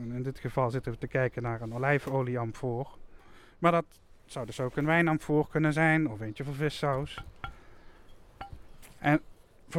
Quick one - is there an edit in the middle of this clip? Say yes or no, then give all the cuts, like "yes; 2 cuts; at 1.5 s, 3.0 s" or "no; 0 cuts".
no; 0 cuts